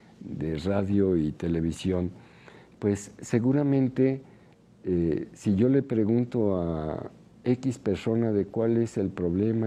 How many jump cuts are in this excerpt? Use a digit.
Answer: 0